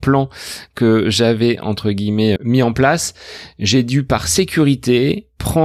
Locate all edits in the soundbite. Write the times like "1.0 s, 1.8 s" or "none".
2.4 s